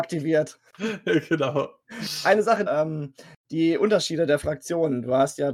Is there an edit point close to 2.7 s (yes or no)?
yes